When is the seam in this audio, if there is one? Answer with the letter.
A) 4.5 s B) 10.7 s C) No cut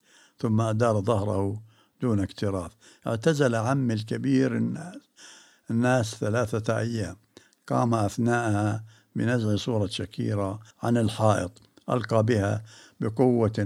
B